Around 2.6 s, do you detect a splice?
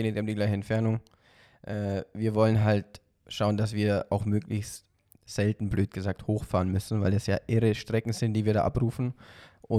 no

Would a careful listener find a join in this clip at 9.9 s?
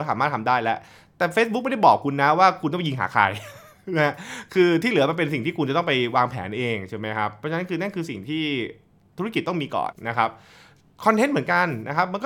yes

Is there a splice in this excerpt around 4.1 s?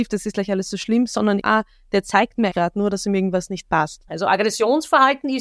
yes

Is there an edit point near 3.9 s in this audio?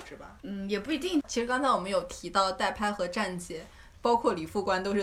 yes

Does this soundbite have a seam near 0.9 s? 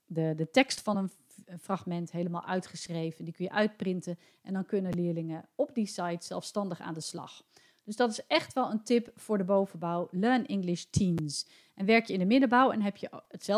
no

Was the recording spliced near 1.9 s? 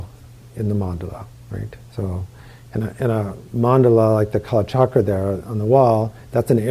yes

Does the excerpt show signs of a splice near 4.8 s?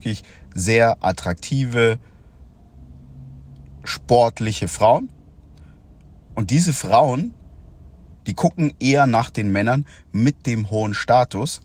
no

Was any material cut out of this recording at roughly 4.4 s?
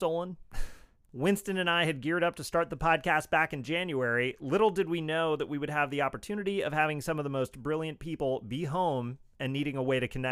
no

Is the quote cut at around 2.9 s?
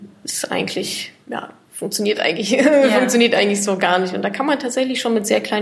no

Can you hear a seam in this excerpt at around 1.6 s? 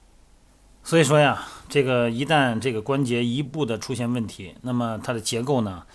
no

